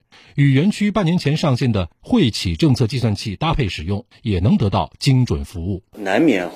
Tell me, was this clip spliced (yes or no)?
yes